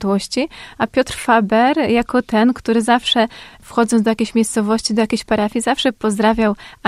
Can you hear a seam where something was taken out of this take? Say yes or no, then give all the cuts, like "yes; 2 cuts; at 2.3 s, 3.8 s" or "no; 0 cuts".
no; 0 cuts